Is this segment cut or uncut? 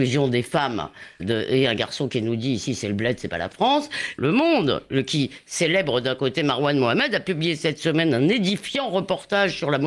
cut